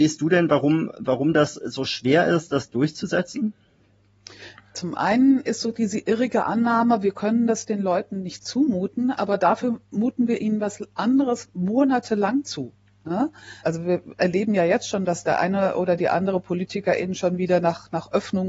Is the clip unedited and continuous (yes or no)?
no